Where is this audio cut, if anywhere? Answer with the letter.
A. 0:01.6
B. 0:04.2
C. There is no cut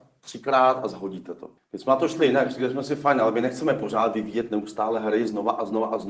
A